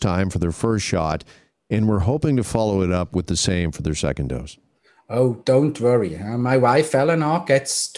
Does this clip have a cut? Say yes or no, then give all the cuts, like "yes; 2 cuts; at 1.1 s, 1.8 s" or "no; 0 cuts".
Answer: no; 0 cuts